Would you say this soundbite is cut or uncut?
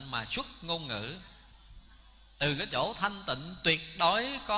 uncut